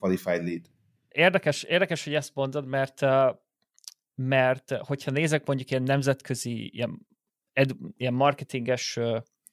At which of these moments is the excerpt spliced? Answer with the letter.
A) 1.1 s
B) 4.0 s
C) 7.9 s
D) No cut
A